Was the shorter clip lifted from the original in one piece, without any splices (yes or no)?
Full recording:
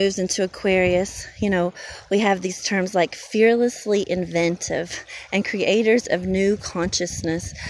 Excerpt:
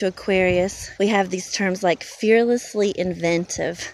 no